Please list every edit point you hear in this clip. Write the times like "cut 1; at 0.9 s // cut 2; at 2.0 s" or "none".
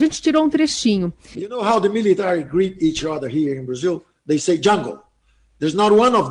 cut 1; at 1.3 s